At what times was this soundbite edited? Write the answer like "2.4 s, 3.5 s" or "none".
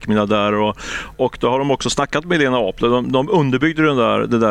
1.1 s